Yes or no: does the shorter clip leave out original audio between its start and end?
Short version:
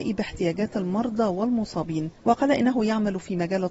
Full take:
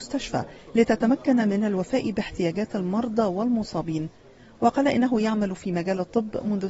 yes